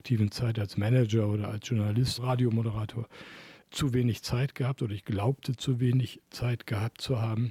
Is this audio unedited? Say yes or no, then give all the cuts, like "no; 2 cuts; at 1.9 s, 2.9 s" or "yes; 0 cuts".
no; 1 cut; at 2.2 s